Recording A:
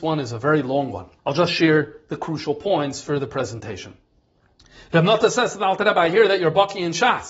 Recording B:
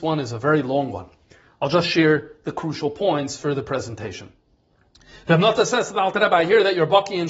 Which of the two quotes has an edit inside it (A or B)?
A